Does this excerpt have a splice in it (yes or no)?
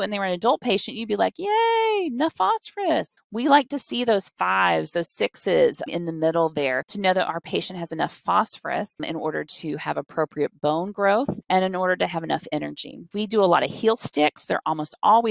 yes